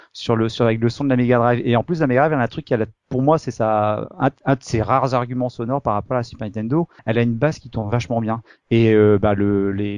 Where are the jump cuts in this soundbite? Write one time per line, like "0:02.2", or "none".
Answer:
0:07.0